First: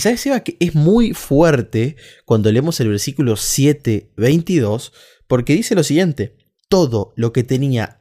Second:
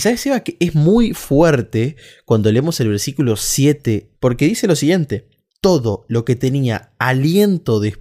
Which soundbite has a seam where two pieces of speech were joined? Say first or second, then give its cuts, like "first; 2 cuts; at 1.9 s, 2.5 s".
second; 1 cut; at 4.1 s